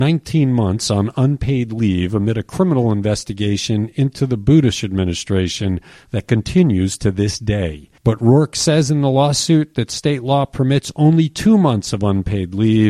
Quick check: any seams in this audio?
yes; 1 cut; at 8.0 s

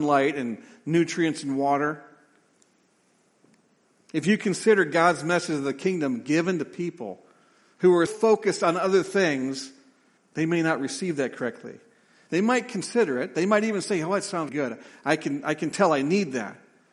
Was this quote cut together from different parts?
yes; 3 cuts; at 8.1 s, 10.2 s, 14.5 s

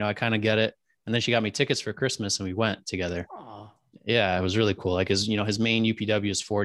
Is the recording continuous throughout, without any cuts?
yes; 0 cuts

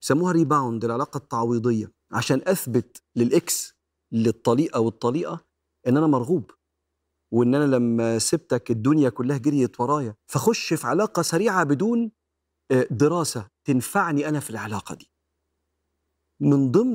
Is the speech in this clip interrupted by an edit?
yes; 2 cuts; at 2.0 s, 10.2 s

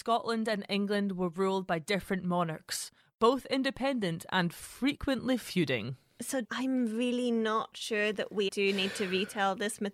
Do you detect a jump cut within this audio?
yes; 2 cuts; at 6.4 s, 8.5 s

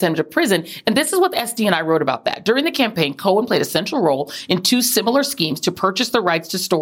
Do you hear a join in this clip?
no; 0 cuts

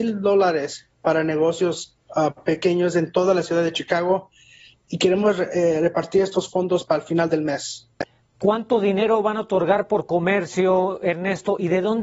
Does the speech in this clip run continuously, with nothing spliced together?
yes; 0 cuts

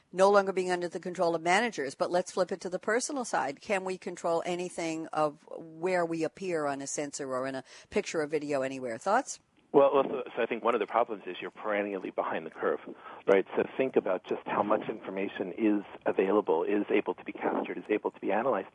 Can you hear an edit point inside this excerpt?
no; 0 cuts

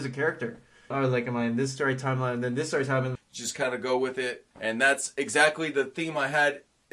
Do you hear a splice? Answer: yes; 3 cuts; at 0.9 s, 3.2 s, 4.5 s

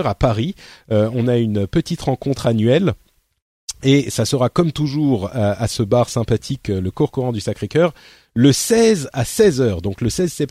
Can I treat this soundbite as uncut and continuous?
yes; 0 cuts

